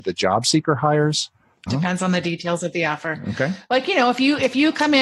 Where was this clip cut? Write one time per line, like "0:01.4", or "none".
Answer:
0:01.7